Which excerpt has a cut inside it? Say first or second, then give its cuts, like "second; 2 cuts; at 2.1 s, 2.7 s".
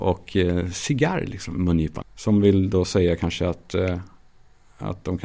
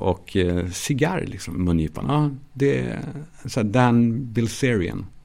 first; 1 cut; at 2.0 s